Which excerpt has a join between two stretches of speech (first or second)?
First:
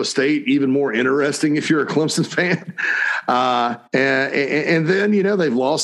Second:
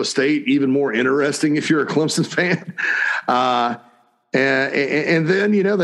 first